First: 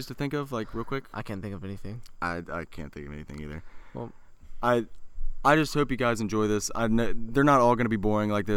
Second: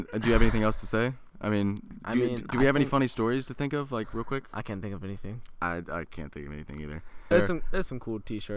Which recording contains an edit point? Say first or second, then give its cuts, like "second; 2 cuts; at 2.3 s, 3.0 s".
second; 1 cut; at 7.3 s